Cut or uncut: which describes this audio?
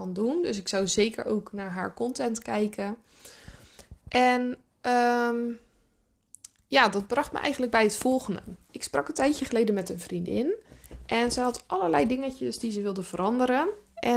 uncut